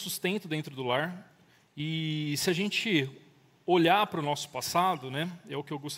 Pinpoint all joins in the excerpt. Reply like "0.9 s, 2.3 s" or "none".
1.7 s

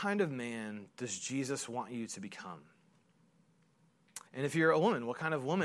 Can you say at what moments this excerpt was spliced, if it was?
4.3 s

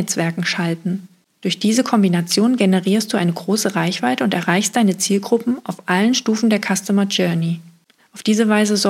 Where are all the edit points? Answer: 8.0 s

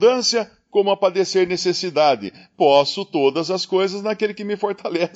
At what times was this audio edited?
none

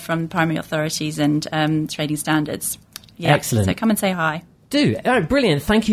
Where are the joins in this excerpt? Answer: none

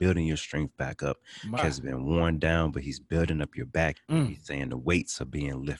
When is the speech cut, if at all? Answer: 1.6 s, 3.9 s

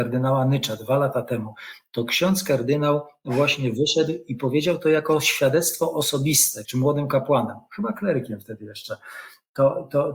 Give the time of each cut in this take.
6.6 s

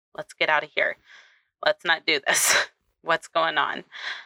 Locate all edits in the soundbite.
none

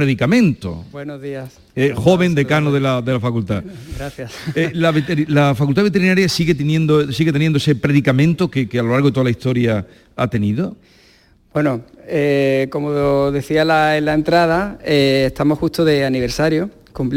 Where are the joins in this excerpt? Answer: 0.9 s

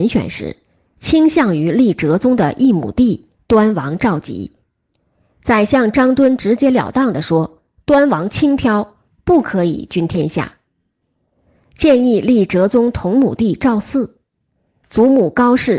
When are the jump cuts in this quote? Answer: 14.8 s

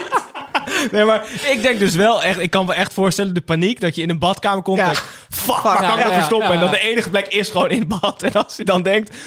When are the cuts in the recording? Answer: none

